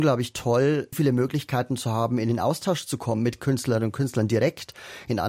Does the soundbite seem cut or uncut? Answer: cut